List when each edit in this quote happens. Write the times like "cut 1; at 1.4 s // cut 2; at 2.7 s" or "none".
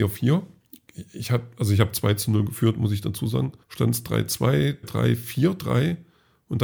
cut 1; at 3.6 s // cut 2; at 4.8 s